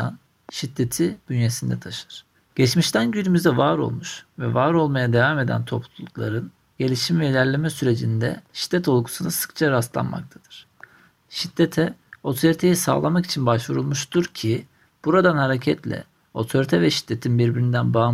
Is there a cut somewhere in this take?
yes; 1 cut; at 2.3 s

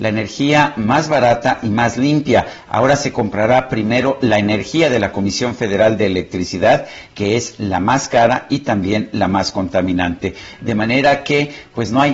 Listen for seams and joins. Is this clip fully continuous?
yes; 0 cuts

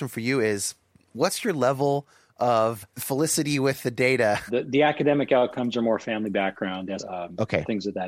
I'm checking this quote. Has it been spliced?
yes; 3 cuts; at 2.9 s, 4.5 s, 7.0 s

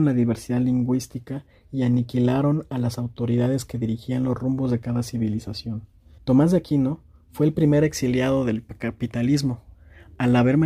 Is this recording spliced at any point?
yes; 1 cut; at 6.2 s

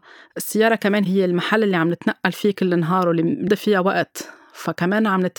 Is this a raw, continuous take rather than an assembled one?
no; 1 cut; at 3.5 s

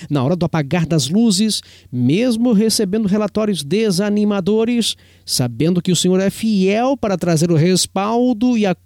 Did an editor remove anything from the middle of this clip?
no; 0 cuts

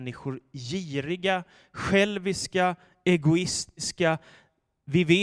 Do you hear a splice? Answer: no; 0 cuts

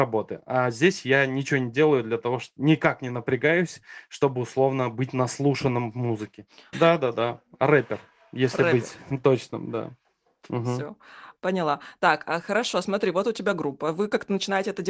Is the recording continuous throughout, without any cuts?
no; 1 cut; at 6.7 s

